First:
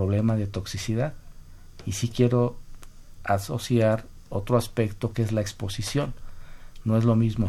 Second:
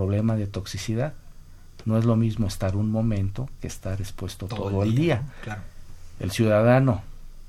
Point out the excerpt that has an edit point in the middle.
second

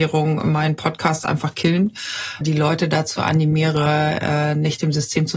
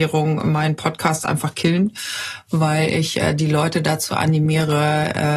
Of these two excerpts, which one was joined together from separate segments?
first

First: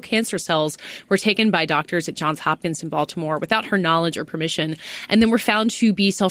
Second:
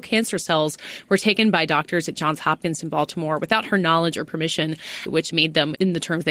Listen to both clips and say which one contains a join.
second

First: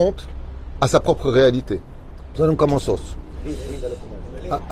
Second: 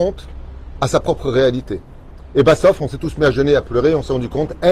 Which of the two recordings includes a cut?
first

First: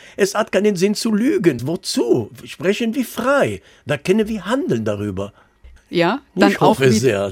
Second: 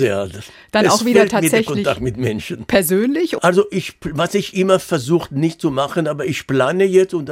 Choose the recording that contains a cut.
first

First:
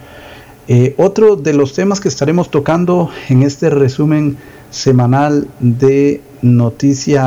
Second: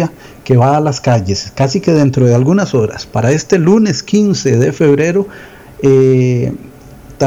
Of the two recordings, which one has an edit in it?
second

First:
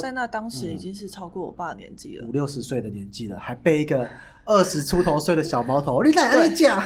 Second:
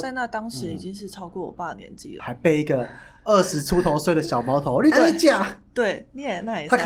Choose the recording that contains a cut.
second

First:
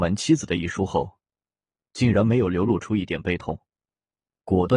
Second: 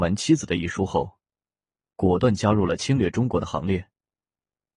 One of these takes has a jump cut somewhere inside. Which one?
second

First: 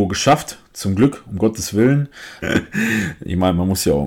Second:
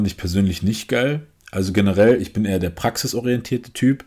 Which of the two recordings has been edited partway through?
first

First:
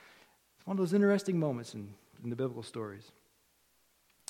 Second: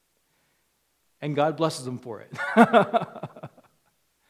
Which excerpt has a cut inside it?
first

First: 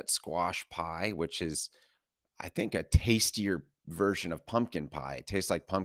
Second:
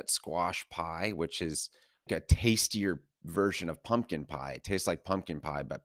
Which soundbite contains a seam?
second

